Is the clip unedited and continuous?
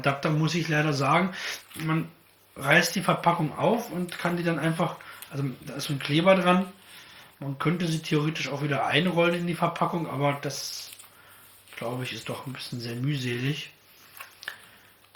no; 1 cut; at 1.6 s

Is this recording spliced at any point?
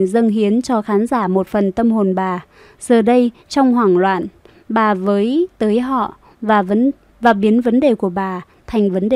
no; 0 cuts

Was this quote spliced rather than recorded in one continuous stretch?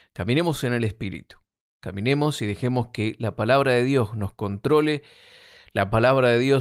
no; 0 cuts

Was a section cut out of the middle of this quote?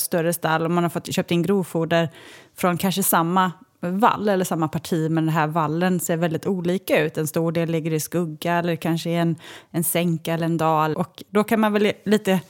yes; 1 cut; at 10.9 s

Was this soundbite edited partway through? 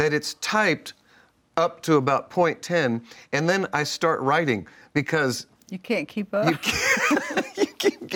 no; 0 cuts

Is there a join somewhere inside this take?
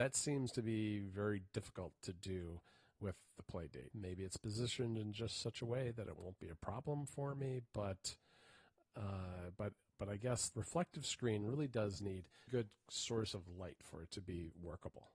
yes; 3 cuts; at 3.9 s, 10.5 s, 12.5 s

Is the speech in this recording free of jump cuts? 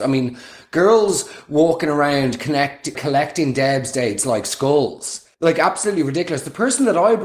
no; 2 cuts; at 2.9 s, 5.3 s

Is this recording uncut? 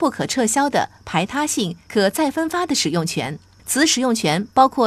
yes; 0 cuts

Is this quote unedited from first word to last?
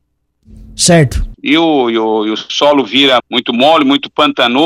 no; 2 cuts; at 1.3 s, 3.2 s

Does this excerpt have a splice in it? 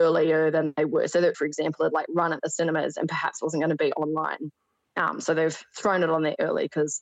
yes; 2 cuts; at 1.3 s, 4.8 s

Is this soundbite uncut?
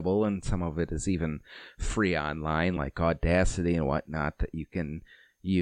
yes; 0 cuts

